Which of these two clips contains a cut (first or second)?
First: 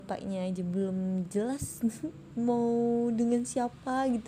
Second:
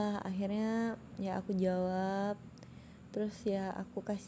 first